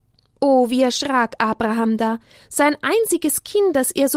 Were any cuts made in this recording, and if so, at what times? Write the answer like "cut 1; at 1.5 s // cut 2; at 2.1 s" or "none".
none